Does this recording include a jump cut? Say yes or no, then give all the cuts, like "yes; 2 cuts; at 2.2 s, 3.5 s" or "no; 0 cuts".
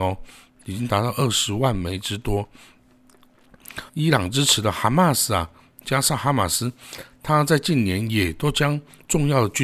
yes; 1 cut; at 3.9 s